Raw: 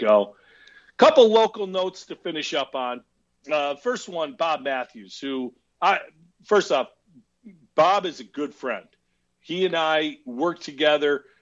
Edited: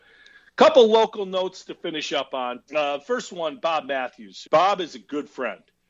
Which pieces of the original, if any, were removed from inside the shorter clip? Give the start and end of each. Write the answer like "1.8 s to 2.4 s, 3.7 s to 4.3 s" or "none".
3.1 s to 3.4 s, 5.2 s to 7.7 s